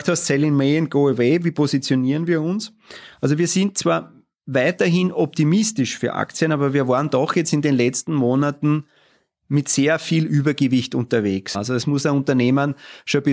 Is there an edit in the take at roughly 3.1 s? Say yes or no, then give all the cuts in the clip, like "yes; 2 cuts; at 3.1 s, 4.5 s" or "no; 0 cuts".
no; 1 cut; at 11.5 s